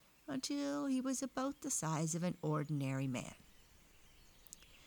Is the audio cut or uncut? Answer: uncut